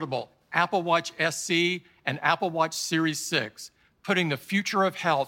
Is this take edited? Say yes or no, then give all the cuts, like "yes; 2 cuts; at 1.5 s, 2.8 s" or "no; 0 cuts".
no; 0 cuts